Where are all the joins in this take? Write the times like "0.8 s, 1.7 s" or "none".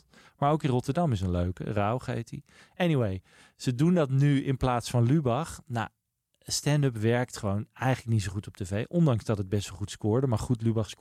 none